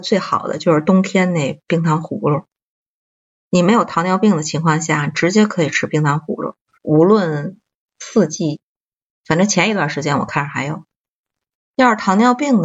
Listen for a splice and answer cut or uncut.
cut